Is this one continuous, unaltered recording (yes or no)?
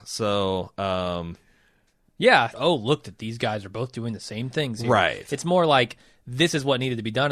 no